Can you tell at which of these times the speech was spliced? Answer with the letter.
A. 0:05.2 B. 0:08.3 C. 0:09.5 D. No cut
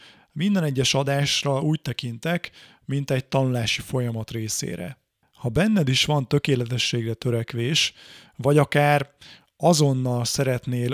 A